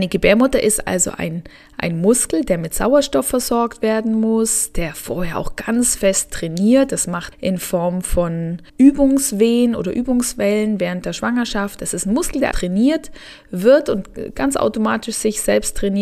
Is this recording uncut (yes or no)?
no